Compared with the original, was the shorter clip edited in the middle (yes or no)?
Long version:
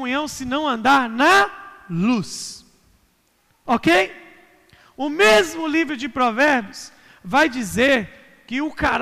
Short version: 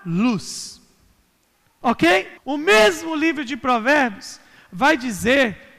yes